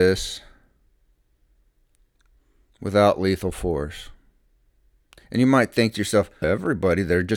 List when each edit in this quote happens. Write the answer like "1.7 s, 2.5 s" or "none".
6.4 s